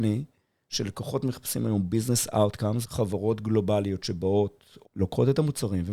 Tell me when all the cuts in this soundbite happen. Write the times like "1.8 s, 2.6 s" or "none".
2.8 s, 4.8 s